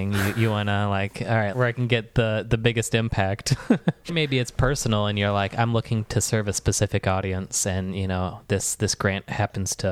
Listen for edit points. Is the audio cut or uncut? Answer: cut